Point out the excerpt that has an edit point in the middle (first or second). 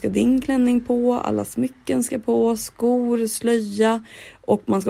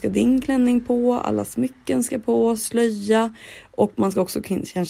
second